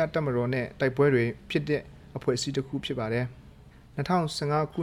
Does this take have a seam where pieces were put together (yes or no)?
yes